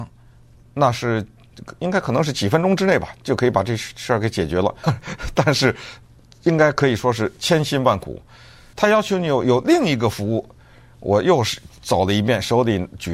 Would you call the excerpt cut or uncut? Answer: cut